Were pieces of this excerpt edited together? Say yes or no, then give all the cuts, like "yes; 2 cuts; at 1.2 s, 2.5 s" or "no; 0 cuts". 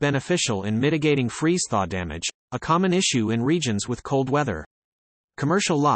no; 0 cuts